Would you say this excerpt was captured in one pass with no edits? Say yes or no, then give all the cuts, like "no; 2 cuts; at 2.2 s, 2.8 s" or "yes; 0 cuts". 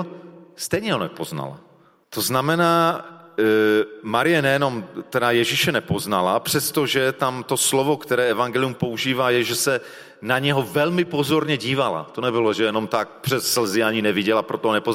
no; 1 cut; at 2.0 s